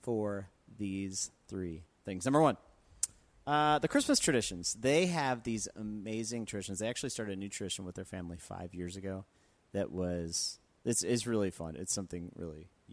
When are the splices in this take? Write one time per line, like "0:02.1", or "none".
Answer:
none